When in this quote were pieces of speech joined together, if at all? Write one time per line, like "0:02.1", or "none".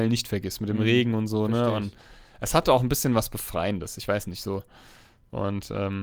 none